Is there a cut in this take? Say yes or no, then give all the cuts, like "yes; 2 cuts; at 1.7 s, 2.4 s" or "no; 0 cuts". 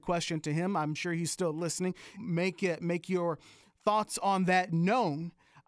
yes; 1 cut; at 2.2 s